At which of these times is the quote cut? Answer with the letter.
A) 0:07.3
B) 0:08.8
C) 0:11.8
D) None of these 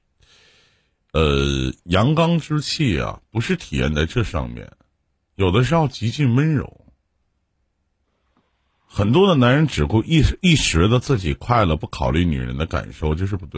D